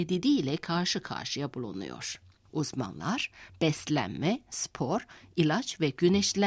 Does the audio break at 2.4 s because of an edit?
no; 0 cuts

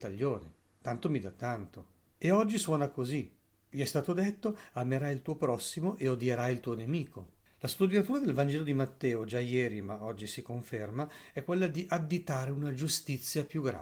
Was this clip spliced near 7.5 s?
yes; 2 cuts; at 2.1 s, 7.5 s

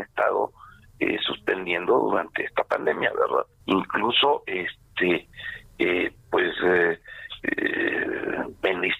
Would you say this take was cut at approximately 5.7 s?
no; 1 cut; at 3.6 s

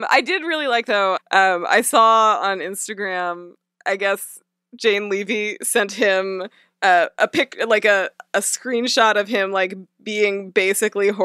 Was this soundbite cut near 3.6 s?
no; 1 cut; at 1.2 s

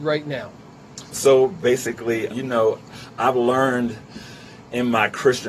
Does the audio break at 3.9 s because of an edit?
no; 2 cuts; at 1.1 s, 2.3 s

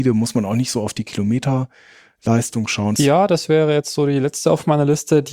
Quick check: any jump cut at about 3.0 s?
yes; 1 cut; at 3.0 s

